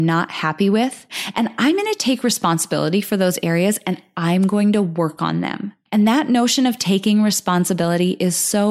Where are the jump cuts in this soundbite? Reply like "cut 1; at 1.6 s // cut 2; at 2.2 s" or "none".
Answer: none

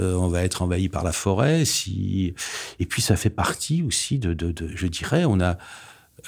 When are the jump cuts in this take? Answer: none

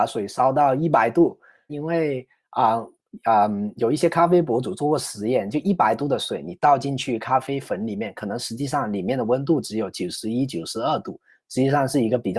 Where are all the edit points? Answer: cut 1; at 1.7 s

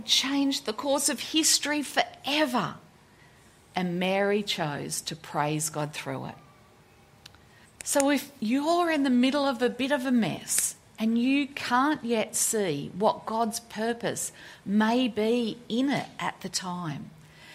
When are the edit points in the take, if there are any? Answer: cut 1; at 7.6 s

